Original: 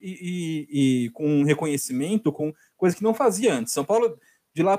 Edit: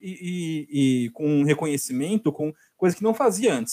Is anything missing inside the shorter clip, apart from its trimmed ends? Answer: no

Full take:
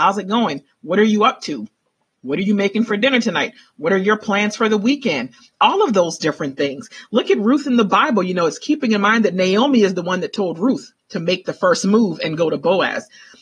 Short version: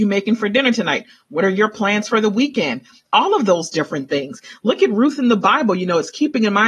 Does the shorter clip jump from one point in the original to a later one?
no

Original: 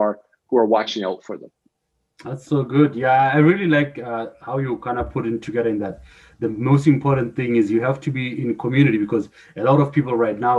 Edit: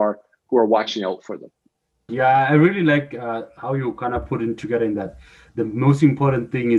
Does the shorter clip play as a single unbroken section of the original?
no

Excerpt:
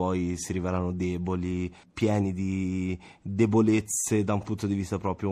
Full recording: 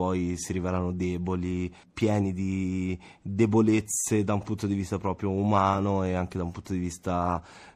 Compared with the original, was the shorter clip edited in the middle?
no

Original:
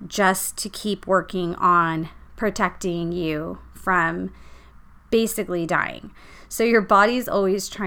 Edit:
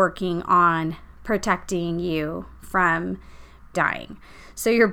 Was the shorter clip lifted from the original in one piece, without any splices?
no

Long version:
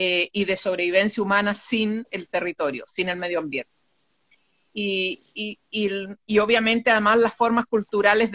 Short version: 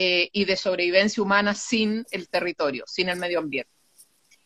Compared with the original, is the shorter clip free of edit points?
yes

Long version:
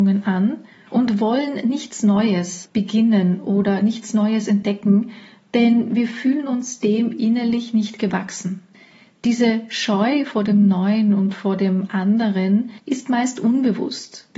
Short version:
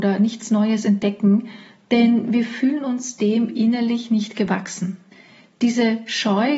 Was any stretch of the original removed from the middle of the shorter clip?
no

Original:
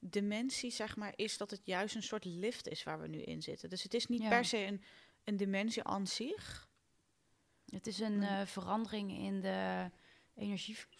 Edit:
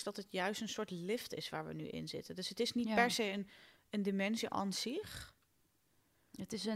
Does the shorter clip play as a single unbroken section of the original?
yes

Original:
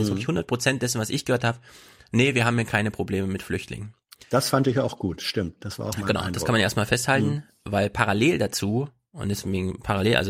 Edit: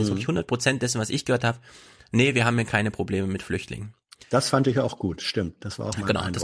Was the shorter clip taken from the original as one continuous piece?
yes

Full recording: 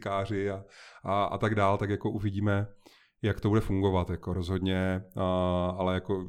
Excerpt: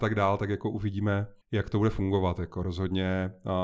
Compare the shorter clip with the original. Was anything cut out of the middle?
yes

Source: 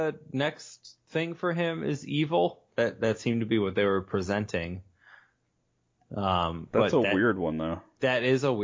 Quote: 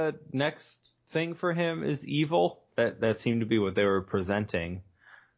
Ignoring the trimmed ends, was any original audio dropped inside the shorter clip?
no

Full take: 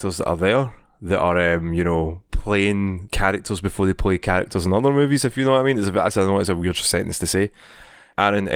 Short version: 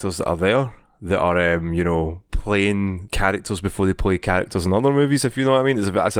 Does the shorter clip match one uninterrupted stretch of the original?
yes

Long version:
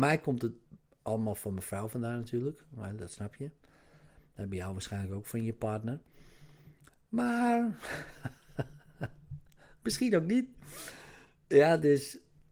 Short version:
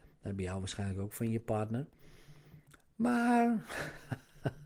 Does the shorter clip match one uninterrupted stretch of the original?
yes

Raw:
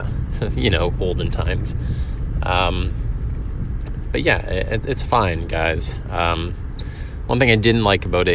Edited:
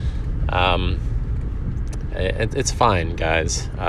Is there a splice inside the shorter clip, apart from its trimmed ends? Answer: yes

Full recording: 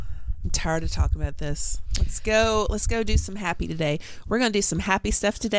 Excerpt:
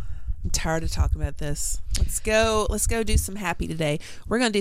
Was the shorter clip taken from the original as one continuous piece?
yes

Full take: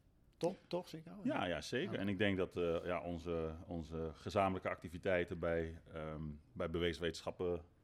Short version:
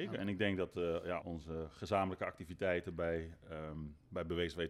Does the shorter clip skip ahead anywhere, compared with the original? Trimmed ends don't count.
yes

